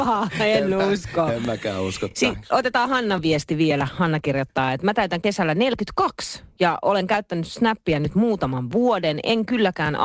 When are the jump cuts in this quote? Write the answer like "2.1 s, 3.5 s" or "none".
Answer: none